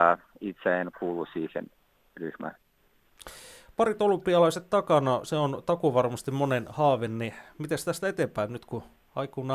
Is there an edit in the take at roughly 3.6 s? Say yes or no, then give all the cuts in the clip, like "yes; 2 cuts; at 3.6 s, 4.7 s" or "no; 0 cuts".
no; 0 cuts